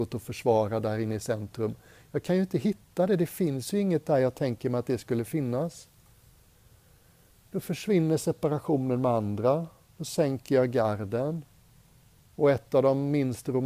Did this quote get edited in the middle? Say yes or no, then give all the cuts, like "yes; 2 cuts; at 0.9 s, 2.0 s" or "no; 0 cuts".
no; 0 cuts